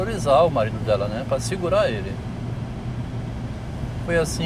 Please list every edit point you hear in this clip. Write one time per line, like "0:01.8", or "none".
none

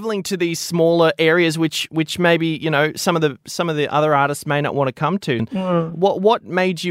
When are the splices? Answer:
0:05.4

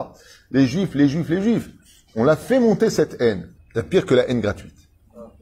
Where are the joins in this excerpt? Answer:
0:02.1
0:03.5

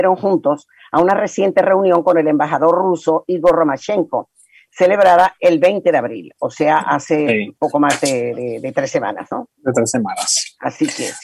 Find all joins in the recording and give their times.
none

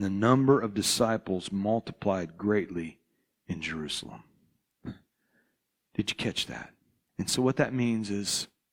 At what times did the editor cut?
0:07.1

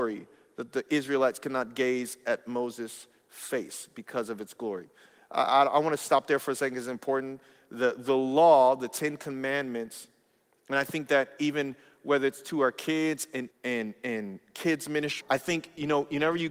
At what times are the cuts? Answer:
0:13.5
0:15.2

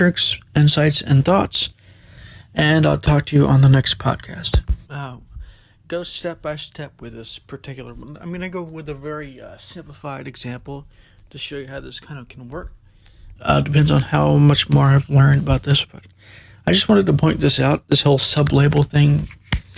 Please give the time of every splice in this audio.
0:04.9
0:13.4

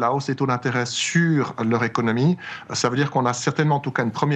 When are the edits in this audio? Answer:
none

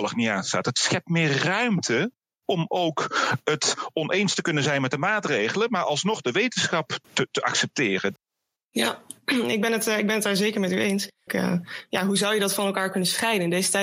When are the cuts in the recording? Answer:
0:07.0
0:11.3

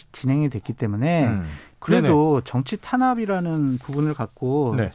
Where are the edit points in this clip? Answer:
0:01.7

